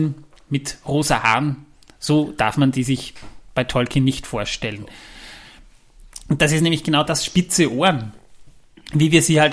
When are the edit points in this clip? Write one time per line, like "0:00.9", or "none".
none